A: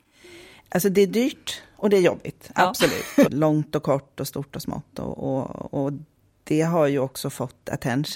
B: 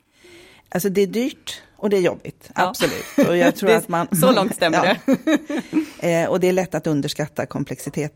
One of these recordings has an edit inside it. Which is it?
A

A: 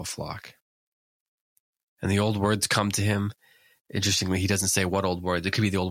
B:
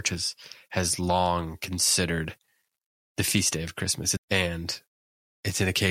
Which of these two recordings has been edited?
B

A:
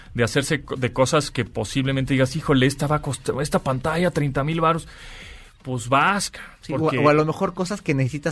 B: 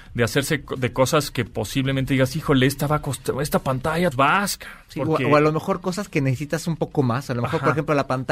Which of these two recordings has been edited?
B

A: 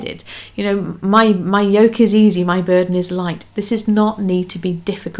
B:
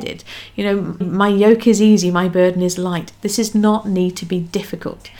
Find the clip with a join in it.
B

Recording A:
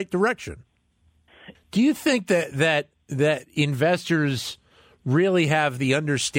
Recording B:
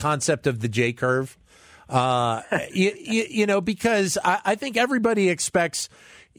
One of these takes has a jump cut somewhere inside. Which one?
A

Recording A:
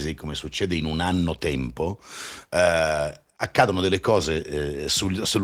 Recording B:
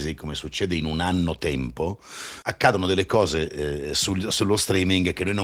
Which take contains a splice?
B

